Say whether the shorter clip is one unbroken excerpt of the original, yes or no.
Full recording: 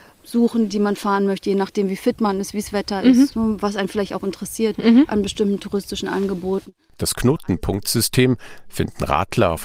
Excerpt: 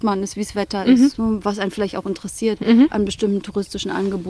yes